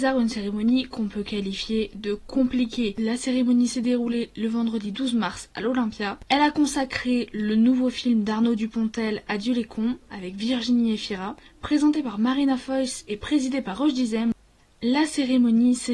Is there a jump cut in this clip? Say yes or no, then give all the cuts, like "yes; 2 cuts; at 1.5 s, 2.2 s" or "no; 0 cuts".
no; 0 cuts